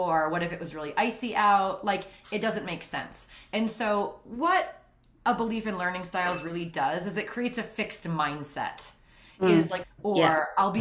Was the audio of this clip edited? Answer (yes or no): yes